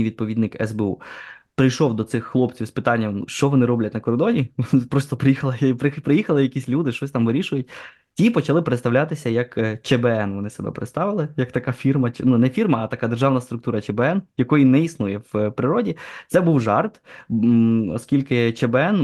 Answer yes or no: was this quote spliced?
no